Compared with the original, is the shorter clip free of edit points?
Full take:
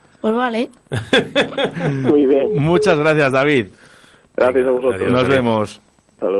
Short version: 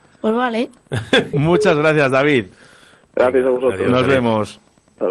no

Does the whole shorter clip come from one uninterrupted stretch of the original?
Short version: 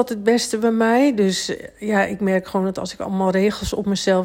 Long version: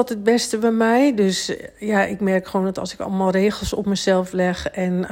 yes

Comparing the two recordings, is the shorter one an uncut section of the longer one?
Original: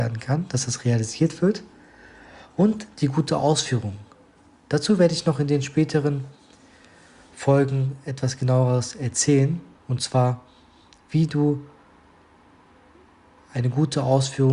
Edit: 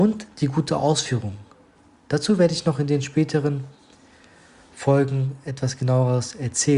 yes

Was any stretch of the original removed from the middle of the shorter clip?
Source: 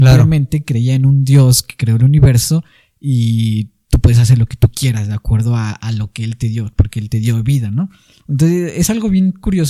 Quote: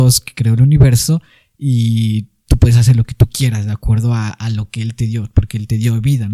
no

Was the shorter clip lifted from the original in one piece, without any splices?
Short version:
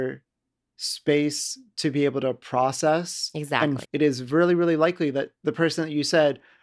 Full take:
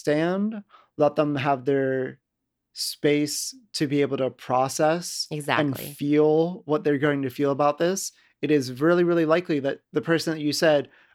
no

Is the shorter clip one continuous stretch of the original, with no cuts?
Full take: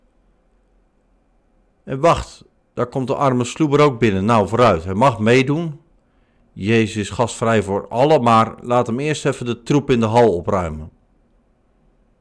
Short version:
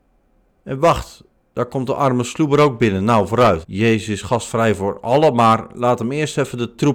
no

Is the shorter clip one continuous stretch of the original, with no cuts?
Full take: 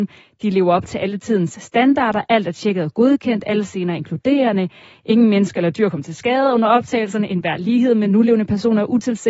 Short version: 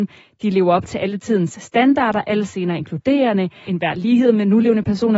no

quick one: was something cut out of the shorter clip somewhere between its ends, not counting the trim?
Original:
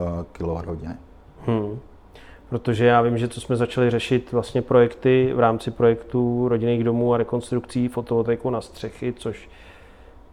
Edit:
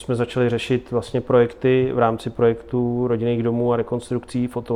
no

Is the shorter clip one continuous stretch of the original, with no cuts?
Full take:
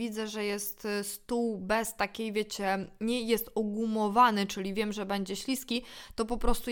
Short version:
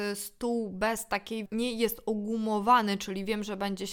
no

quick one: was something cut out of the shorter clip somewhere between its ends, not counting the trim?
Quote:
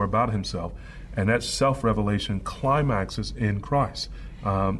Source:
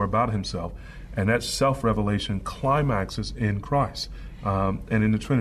no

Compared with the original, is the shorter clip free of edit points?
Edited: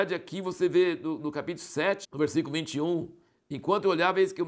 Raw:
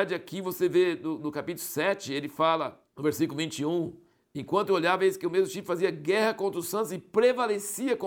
no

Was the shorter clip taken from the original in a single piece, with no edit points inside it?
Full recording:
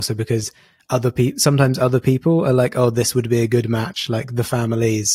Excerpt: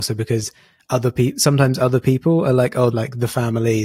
no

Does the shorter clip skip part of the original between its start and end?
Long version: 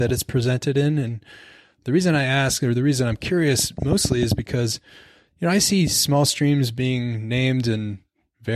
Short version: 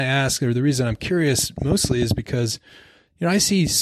no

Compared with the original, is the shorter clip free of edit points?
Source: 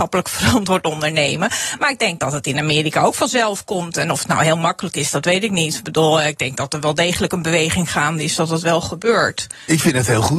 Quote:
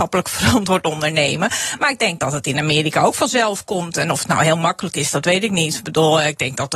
yes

